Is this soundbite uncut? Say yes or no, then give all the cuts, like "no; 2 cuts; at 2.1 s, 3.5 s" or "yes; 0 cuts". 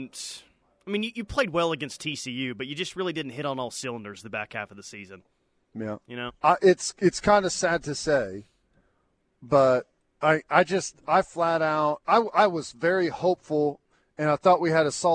no; 1 cut; at 6.3 s